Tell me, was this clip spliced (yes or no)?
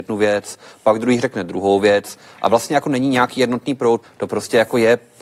yes